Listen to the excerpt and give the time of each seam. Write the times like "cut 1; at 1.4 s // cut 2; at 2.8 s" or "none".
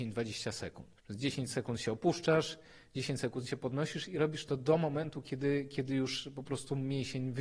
cut 1; at 1.0 s